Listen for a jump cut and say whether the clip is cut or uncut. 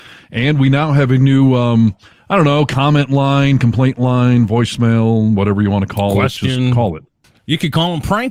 uncut